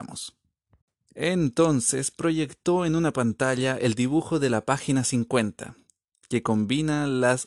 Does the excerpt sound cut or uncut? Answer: uncut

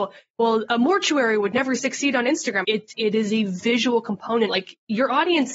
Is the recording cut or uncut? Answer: cut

